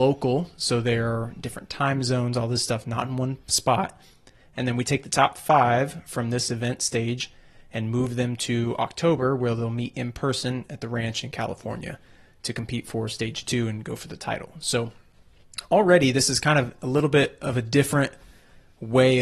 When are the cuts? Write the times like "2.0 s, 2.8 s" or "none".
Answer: none